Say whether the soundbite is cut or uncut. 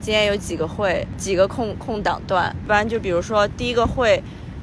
uncut